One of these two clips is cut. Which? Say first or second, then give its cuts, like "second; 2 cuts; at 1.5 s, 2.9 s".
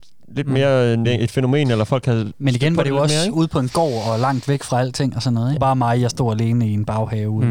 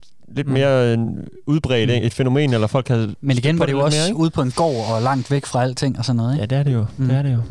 first; 2 cuts; at 1.0 s, 5.6 s